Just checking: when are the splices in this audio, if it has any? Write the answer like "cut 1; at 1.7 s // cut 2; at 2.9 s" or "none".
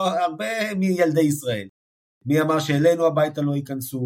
none